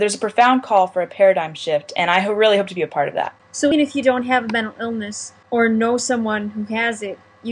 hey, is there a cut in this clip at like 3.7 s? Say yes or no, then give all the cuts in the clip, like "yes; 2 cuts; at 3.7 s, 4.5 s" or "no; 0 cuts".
yes; 1 cut; at 3.7 s